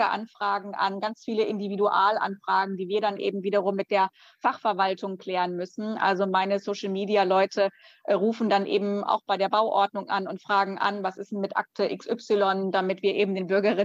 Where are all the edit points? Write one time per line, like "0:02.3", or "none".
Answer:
none